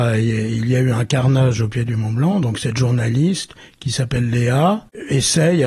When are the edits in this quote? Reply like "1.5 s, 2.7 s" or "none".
none